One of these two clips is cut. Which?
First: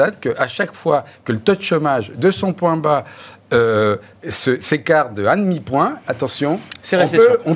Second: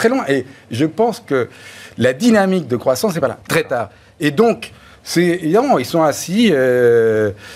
second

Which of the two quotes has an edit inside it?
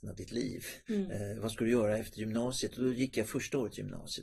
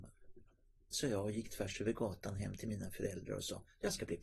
second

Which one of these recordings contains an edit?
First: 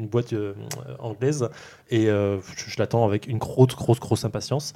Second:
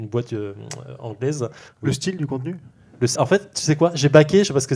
second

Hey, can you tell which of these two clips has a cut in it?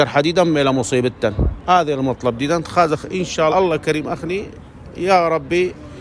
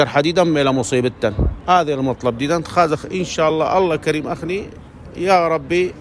first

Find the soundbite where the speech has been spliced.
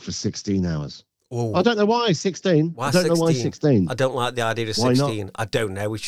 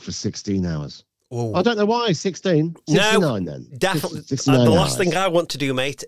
second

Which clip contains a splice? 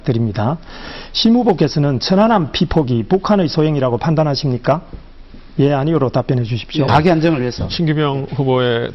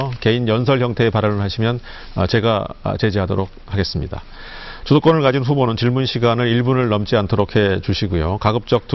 first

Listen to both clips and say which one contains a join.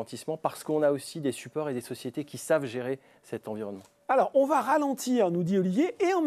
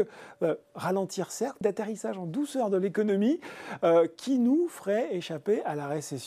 second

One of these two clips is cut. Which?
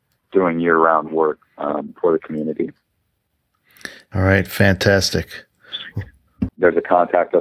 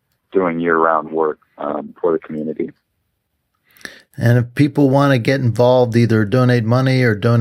first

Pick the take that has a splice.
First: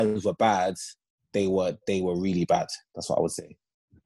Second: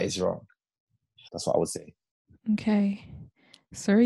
second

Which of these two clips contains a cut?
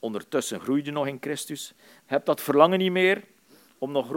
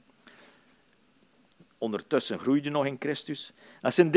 first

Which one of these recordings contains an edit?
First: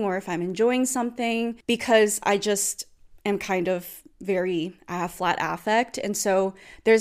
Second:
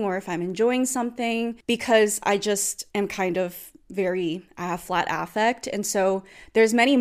second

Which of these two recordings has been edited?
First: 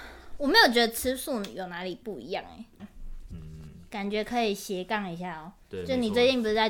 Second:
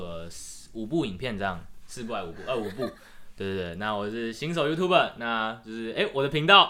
first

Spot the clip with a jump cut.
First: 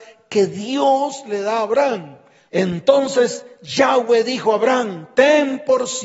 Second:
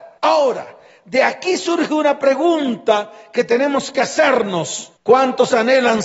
first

